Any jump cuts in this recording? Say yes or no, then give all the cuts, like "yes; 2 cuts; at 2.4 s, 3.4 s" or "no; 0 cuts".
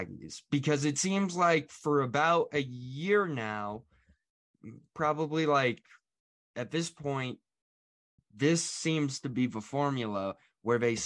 yes; 1 cut; at 8.2 s